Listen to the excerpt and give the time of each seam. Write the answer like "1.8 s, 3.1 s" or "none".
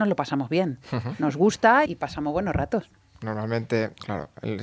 1.9 s

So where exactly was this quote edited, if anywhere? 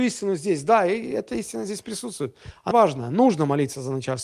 2.7 s

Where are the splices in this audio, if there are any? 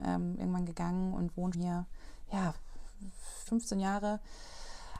1.5 s, 3.5 s

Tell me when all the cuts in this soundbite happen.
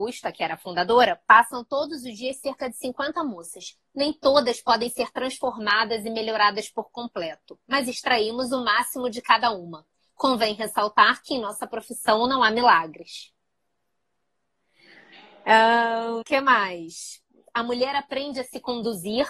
16.2 s

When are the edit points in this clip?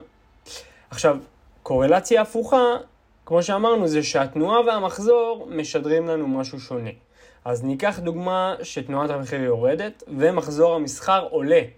none

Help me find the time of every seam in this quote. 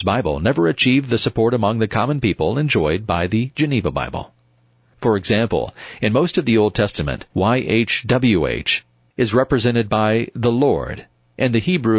4.9 s, 7.3 s

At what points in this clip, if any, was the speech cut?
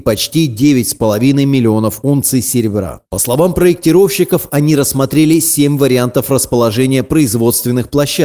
none

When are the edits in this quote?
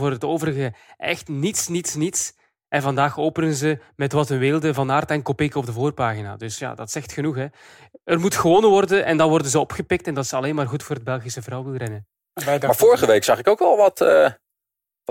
none

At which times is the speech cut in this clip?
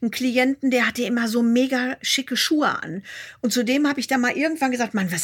none

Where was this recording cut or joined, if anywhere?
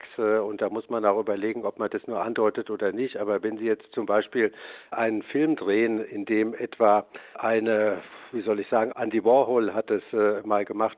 8.9 s

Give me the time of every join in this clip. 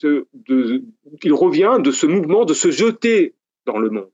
none

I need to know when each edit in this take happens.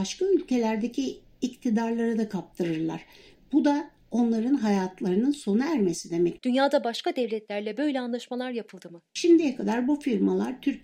6.4 s, 9.1 s

